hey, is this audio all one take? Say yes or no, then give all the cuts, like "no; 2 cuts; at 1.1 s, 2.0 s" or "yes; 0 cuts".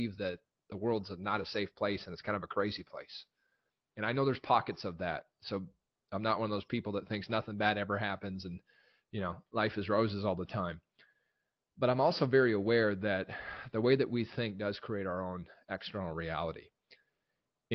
yes; 0 cuts